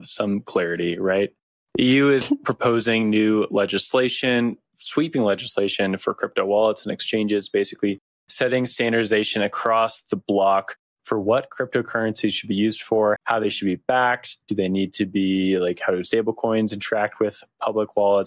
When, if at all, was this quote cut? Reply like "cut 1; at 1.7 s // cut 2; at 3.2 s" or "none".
cut 1; at 13.2 s